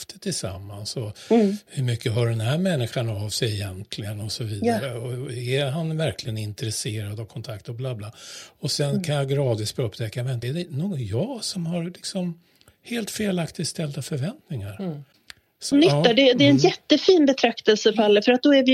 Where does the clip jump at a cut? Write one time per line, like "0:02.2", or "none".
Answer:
0:10.4
0:15.7